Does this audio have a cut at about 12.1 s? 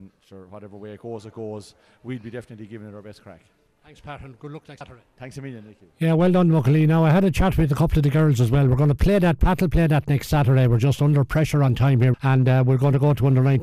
yes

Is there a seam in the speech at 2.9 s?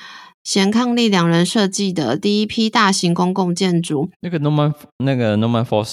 no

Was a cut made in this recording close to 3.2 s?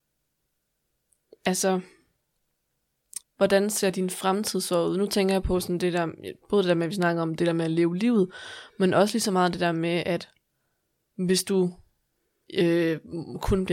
yes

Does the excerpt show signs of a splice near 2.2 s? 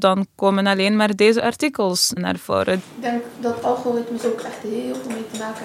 yes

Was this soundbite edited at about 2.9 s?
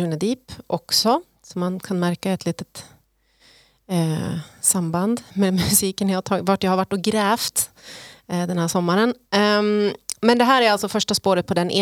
no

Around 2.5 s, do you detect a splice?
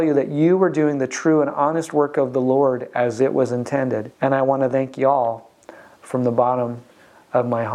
no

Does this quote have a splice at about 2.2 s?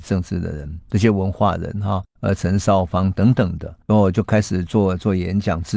yes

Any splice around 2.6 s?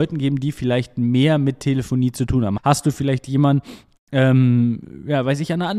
yes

